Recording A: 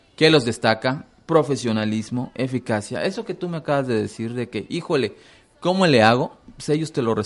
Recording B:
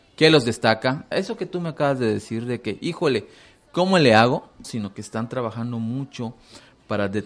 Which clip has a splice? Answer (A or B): B